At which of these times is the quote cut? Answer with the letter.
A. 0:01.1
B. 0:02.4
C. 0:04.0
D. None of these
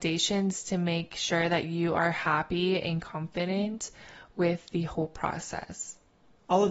D